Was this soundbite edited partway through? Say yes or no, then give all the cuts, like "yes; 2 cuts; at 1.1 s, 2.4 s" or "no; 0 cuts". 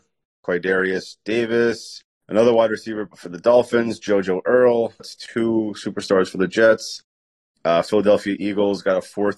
yes; 1 cut; at 5.0 s